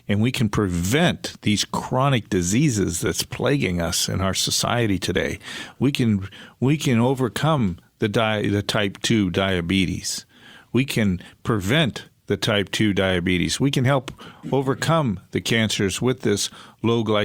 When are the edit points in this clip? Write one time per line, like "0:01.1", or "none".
0:13.6